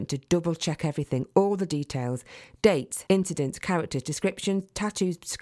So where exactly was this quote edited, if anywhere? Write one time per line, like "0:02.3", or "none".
0:03.1